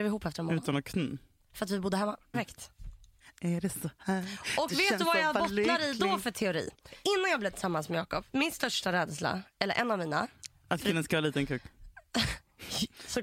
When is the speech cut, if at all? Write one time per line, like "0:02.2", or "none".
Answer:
0:02.3